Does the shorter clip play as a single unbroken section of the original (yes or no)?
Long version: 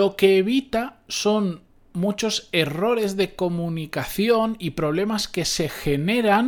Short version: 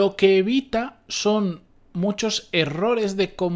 yes